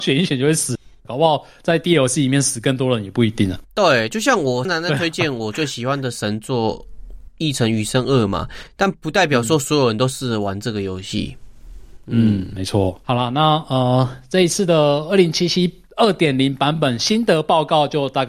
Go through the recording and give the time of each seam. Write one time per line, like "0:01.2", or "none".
0:04.7